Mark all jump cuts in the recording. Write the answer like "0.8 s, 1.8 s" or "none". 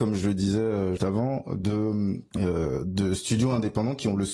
1.0 s